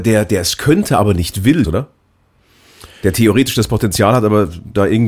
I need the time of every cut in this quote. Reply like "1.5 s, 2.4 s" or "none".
1.6 s